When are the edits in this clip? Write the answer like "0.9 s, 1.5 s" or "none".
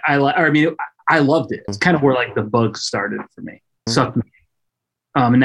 1.7 s, 3.9 s